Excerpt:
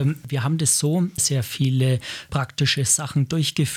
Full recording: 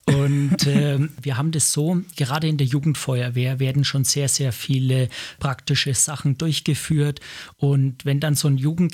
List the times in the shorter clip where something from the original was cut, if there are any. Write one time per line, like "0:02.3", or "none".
0:01.2

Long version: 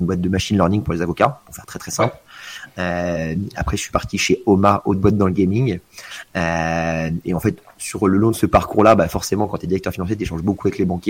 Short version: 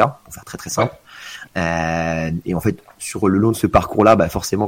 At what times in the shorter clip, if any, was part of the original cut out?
0:01.5

